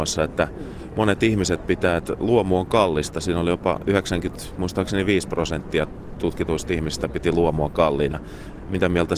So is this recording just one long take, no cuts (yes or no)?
yes